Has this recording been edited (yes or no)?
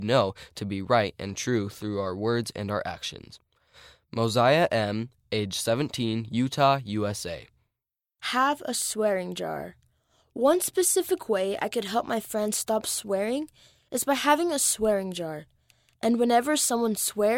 no